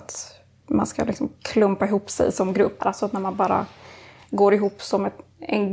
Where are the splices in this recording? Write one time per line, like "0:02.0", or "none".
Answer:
0:02.8